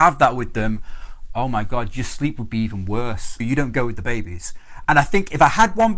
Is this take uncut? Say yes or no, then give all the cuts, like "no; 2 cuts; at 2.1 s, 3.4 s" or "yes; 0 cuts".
no; 1 cut; at 3.4 s